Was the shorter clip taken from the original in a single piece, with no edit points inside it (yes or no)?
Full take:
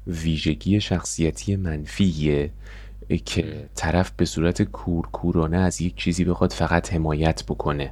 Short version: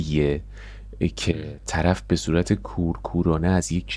yes